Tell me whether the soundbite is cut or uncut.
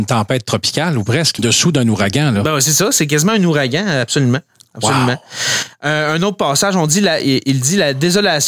cut